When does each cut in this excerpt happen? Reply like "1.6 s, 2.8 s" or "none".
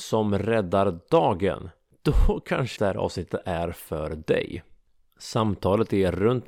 2.8 s